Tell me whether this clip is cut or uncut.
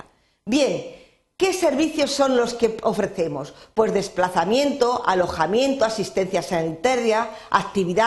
uncut